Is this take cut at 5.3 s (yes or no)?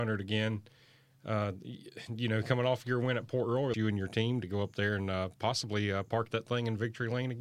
no